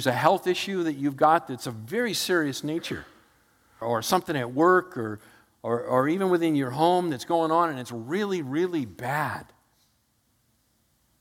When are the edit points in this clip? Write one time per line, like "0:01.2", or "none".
0:03.8